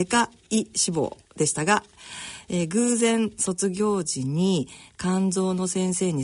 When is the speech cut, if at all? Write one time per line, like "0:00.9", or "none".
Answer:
0:01.3